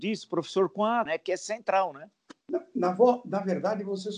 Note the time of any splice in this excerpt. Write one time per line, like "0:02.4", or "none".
0:01.1
0:02.4